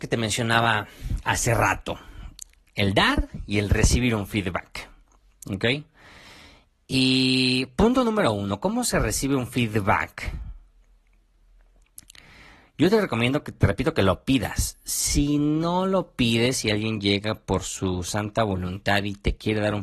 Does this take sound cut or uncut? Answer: uncut